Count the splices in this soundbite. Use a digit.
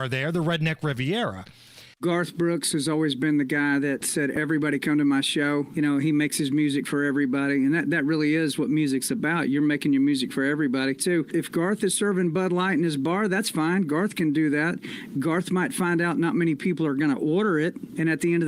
2